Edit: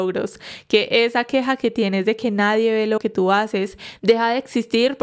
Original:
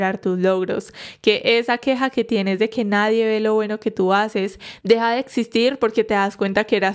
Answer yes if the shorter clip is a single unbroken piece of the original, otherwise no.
no